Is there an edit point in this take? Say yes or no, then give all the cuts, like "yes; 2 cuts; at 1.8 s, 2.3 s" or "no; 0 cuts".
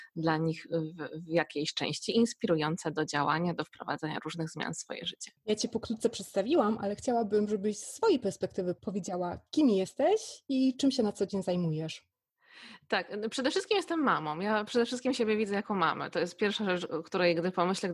no; 0 cuts